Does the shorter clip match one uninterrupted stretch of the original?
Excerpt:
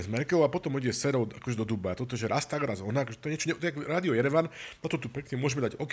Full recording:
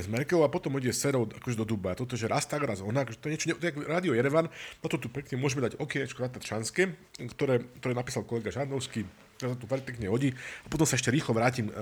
yes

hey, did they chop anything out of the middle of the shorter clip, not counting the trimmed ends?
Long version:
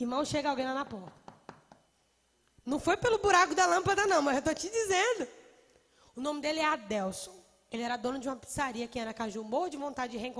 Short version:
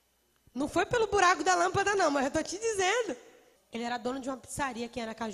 yes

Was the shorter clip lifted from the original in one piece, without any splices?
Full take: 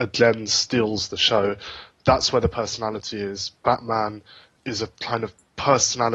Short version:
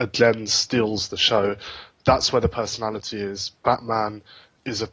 yes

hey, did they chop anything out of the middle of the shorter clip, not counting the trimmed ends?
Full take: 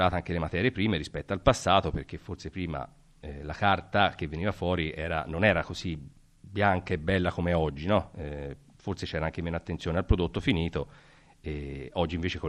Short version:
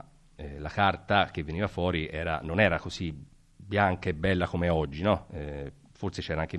no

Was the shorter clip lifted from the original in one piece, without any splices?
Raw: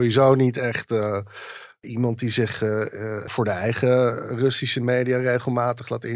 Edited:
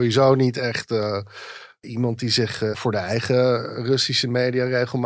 no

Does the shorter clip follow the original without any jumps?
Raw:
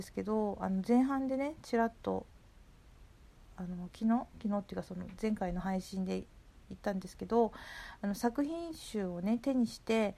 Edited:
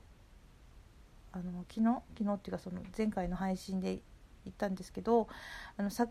yes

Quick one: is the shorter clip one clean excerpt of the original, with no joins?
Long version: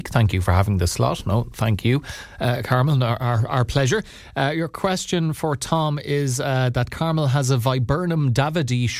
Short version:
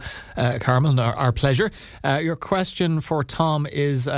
no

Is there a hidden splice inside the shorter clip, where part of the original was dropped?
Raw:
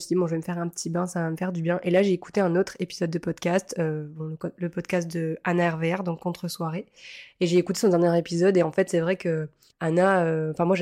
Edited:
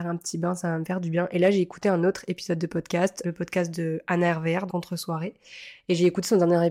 yes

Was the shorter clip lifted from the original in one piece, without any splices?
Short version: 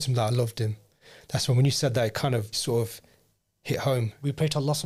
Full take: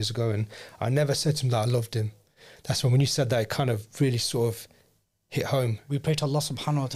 no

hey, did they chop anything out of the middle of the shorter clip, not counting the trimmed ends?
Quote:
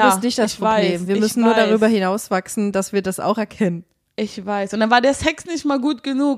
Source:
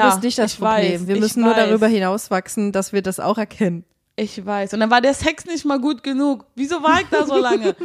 no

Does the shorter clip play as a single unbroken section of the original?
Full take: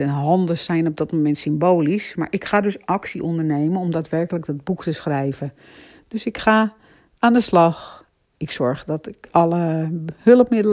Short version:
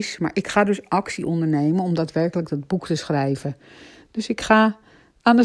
yes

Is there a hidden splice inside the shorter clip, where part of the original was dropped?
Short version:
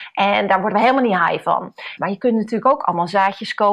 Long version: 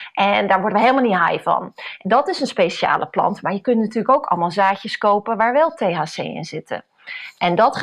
yes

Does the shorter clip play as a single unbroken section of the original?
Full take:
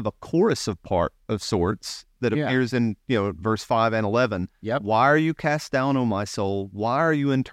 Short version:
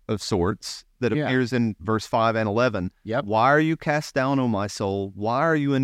no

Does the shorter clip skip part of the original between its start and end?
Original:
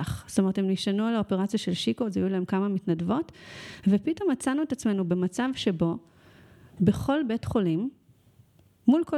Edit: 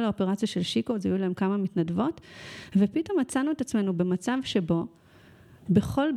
no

